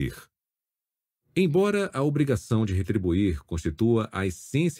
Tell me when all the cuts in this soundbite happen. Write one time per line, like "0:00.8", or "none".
none